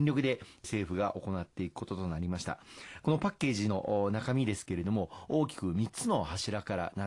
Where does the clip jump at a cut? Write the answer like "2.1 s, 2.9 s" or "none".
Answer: none

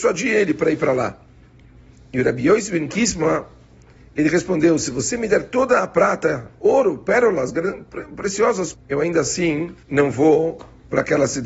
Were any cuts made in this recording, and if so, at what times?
8.7 s, 9.8 s

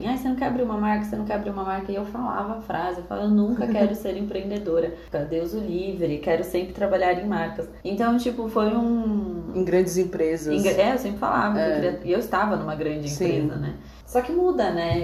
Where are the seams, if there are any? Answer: 5.1 s

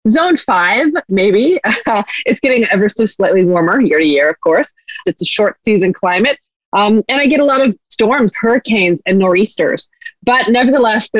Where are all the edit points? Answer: 1.1 s, 5.0 s, 8.3 s

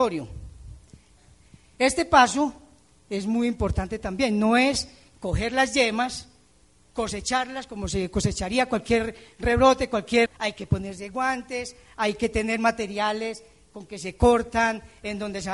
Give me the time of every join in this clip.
10.3 s

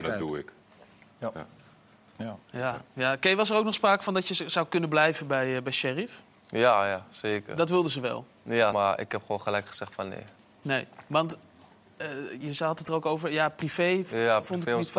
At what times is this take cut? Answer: 8.7 s, 12.4 s

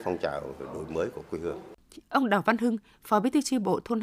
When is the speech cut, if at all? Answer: 2.0 s

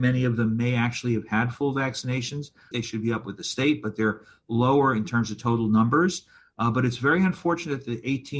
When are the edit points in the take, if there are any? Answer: 2.7 s

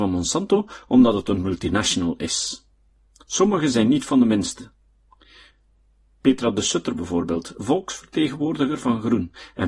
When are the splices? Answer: none

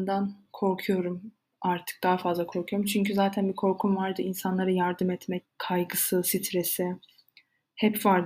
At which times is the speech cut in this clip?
5.4 s

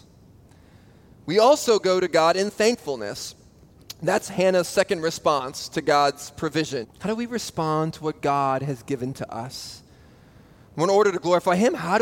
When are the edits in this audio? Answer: 6.8 s

